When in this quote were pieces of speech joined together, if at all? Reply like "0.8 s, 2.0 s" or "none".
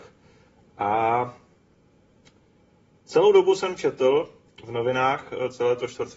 none